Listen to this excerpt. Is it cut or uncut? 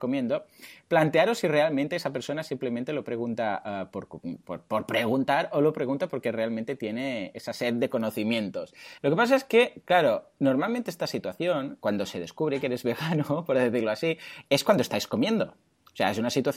cut